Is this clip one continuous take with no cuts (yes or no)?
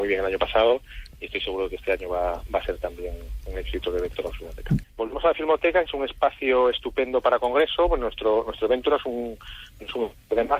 no